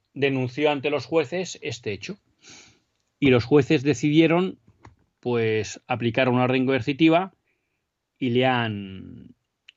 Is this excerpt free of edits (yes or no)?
yes